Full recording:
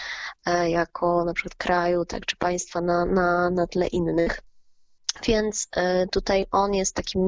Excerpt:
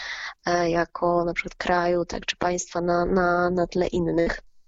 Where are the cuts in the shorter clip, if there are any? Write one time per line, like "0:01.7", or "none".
none